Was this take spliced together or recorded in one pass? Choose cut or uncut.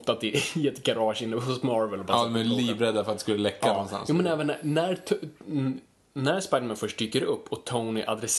uncut